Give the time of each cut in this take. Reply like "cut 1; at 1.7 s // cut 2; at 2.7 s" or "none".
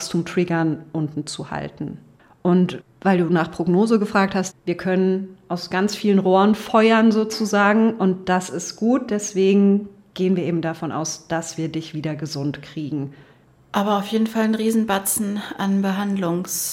cut 1; at 4.5 s

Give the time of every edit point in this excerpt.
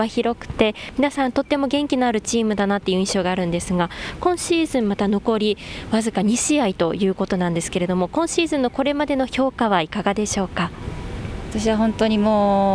none

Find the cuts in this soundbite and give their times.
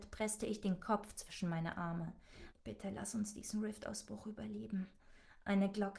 cut 1; at 2.5 s

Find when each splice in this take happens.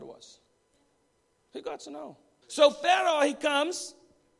cut 1; at 2.4 s

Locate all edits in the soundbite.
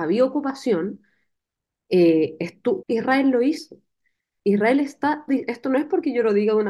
cut 1; at 2.8 s // cut 2; at 5.3 s

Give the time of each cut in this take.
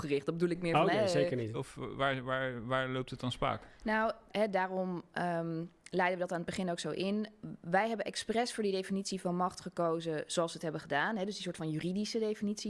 cut 1; at 1.5 s // cut 2; at 4.3 s

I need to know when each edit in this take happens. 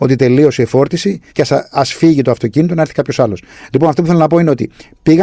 cut 1; at 1.3 s

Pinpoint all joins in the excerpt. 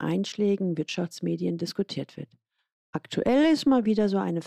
none

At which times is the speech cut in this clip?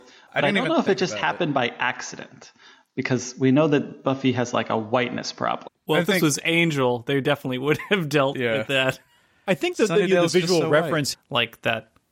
cut 1; at 5.7 s // cut 2; at 11.1 s

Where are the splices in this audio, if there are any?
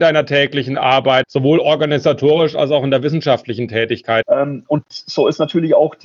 cut 1; at 1.2 s // cut 2; at 4.2 s

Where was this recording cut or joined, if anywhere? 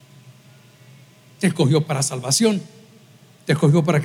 none

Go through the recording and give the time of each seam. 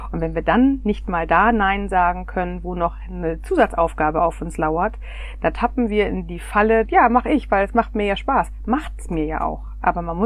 cut 1; at 6.9 s

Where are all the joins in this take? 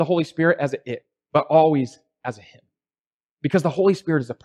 none

